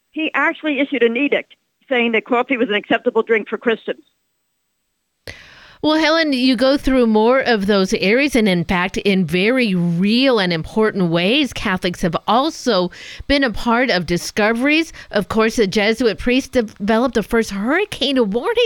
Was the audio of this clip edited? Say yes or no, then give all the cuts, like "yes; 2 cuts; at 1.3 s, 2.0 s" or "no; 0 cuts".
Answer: no; 0 cuts